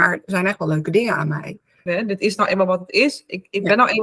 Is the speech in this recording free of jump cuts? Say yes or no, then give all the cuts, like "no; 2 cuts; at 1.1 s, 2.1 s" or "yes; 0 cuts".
no; 1 cut; at 1.9 s